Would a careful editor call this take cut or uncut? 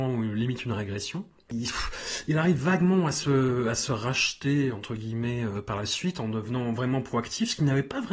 cut